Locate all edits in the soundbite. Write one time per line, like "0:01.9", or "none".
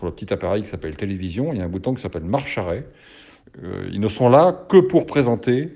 0:03.4